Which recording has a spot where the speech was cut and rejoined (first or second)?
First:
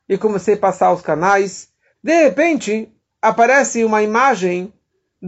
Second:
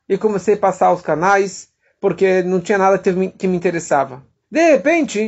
first